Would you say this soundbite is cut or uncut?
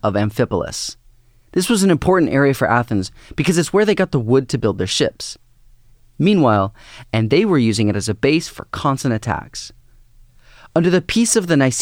cut